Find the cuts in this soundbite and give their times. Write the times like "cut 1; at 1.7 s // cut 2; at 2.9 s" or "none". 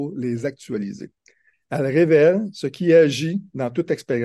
cut 1; at 1.5 s